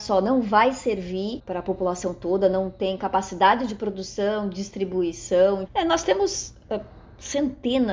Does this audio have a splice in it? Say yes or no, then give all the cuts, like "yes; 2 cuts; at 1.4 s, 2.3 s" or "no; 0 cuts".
yes; 1 cut; at 5.6 s